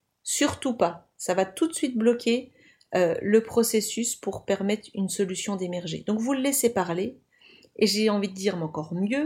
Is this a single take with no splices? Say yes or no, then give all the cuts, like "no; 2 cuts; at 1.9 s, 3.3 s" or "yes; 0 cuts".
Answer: yes; 0 cuts